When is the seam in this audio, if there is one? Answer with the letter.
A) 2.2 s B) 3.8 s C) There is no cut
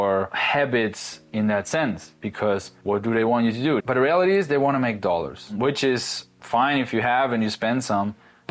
B